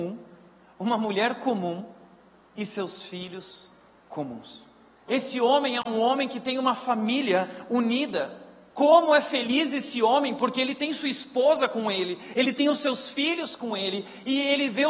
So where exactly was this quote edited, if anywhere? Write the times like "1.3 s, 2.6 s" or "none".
5.1 s, 8.7 s